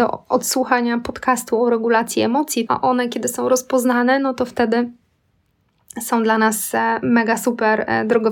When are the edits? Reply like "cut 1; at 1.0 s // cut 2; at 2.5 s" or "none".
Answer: cut 1; at 2.7 s